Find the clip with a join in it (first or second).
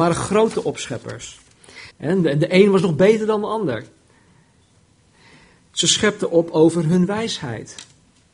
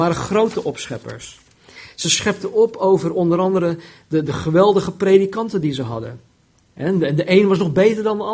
first